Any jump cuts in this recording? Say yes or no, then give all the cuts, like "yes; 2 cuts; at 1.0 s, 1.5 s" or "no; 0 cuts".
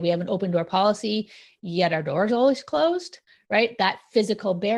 no; 0 cuts